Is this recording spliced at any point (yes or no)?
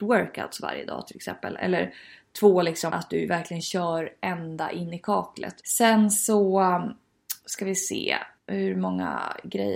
yes